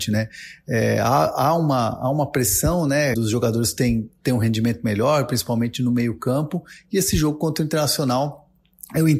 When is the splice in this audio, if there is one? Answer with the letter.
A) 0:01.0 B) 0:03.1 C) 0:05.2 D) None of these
B